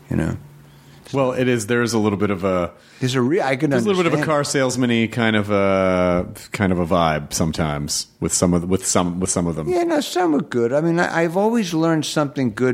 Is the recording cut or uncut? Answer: uncut